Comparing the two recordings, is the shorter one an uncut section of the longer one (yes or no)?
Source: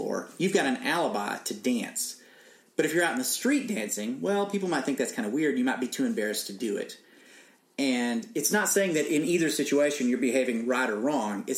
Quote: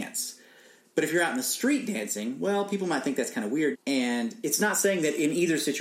no